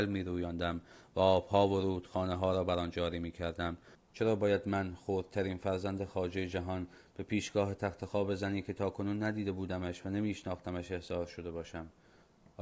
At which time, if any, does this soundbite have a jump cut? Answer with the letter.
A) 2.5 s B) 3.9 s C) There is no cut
B